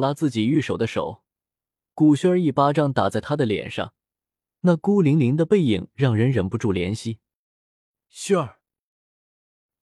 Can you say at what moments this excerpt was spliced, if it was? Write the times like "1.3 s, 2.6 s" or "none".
4.5 s